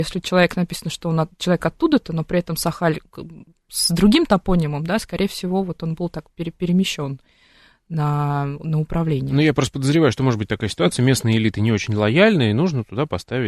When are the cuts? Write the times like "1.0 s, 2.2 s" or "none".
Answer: none